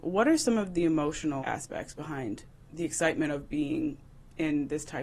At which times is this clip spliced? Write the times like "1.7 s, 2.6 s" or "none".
none